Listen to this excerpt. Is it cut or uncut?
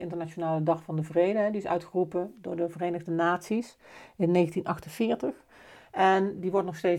uncut